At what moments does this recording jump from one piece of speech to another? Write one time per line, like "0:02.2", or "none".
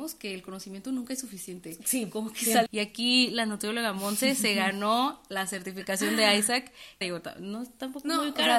0:02.7
0:07.0